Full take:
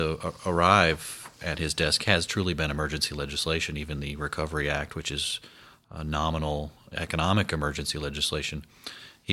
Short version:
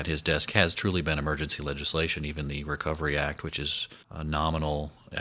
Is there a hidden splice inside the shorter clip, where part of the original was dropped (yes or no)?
yes